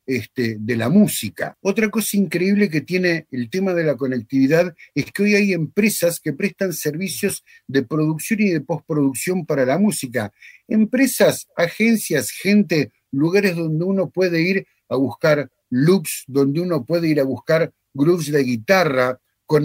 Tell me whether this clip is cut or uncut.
uncut